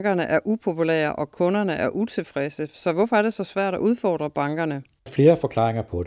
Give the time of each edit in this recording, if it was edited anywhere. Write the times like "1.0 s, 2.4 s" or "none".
5.1 s